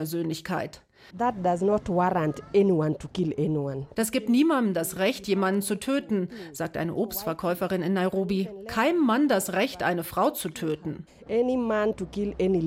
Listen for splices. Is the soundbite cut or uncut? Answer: cut